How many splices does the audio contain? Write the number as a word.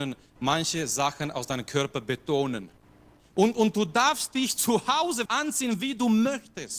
two